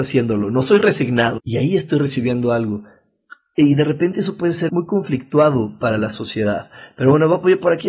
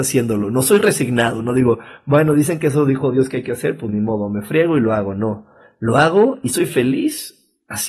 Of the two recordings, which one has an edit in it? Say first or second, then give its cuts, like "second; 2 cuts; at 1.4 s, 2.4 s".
first; 2 cuts; at 1.4 s, 4.7 s